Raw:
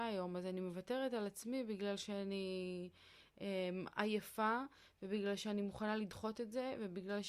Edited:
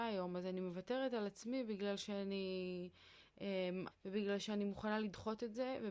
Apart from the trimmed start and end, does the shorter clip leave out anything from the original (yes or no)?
yes